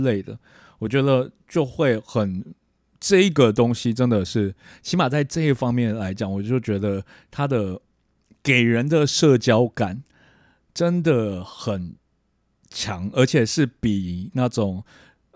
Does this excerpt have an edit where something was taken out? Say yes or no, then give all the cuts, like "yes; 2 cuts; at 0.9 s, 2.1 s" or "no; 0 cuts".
no; 0 cuts